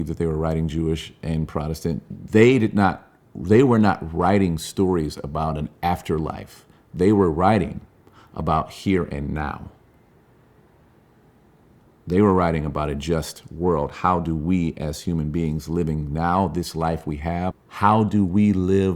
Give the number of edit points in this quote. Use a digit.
2